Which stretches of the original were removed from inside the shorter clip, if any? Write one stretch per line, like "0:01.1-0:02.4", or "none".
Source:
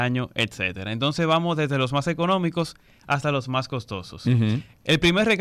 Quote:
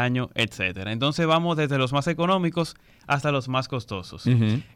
none